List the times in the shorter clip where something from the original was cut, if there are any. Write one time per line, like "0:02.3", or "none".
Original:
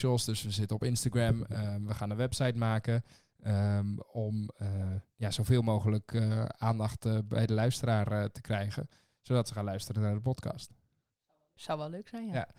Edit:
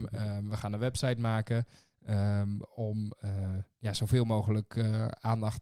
none